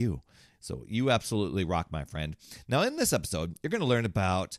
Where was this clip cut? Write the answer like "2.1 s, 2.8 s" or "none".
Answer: none

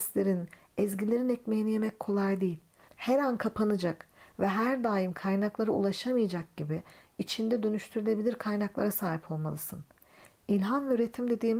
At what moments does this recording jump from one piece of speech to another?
2.9 s

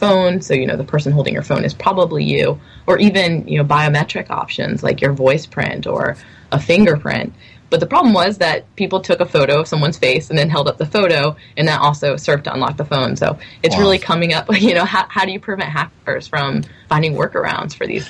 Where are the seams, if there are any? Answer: 7.6 s

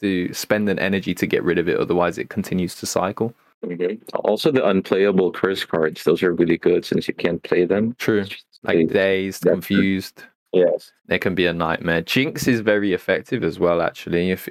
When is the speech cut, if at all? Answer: none

